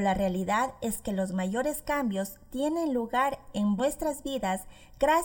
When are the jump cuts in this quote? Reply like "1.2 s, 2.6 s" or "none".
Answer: 3.8 s